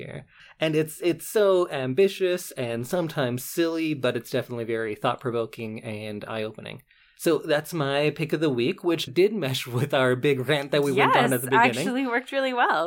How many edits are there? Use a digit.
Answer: 1